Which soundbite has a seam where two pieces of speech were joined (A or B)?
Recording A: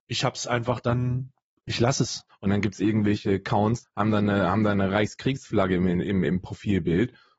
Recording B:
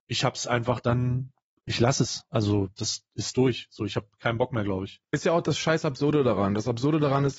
A